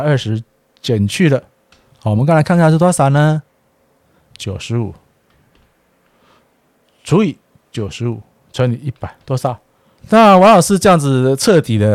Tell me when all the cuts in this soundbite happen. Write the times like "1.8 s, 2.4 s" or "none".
10.0 s